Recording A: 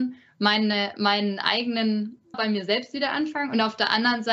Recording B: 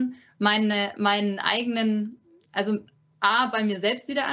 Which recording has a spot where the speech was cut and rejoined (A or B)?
A